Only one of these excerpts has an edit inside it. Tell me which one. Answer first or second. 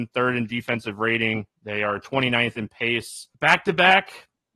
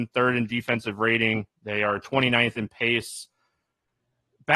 first